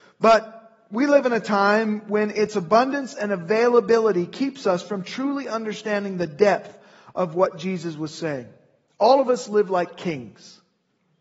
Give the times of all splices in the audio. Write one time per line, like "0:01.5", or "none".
none